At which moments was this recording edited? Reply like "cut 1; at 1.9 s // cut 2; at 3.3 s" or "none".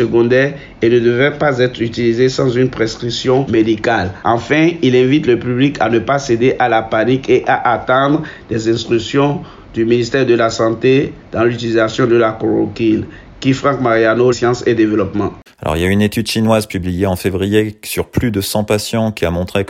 cut 1; at 14.3 s // cut 2; at 15.5 s